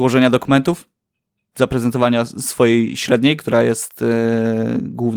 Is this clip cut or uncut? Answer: uncut